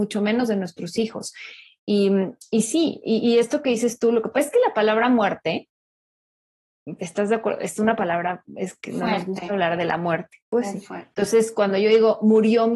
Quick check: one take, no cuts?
no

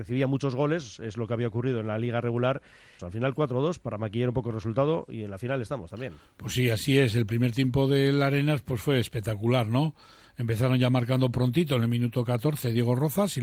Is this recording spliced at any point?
yes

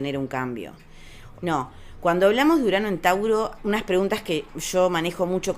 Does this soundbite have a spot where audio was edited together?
yes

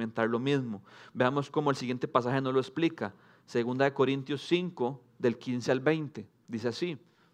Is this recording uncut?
yes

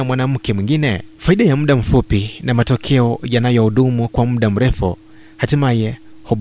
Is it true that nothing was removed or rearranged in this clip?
no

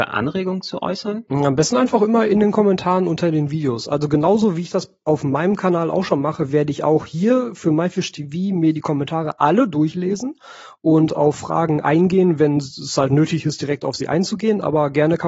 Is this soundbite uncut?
yes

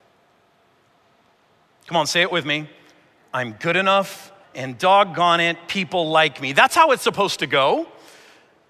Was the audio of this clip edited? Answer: yes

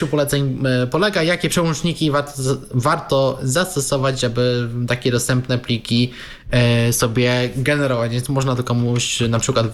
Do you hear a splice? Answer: no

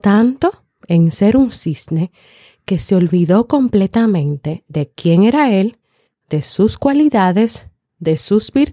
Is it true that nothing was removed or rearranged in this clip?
yes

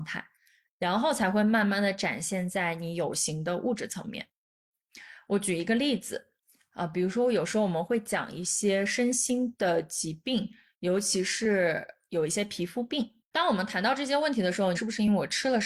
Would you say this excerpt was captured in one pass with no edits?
no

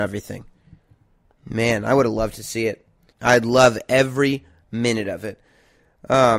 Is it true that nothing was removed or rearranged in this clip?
no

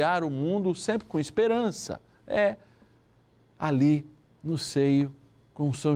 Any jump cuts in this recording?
no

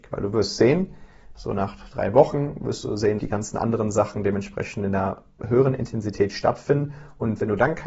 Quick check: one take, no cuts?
no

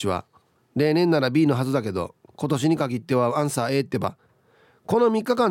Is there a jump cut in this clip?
no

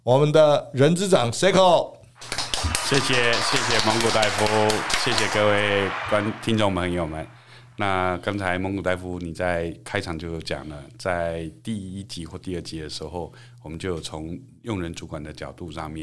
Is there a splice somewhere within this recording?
no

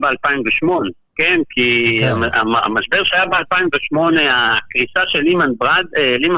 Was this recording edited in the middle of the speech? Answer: no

